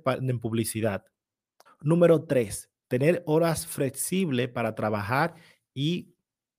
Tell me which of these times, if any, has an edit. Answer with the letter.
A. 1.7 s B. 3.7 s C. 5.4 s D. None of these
A